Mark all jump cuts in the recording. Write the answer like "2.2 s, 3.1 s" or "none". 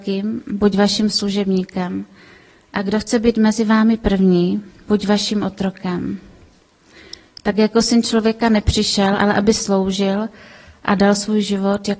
9.2 s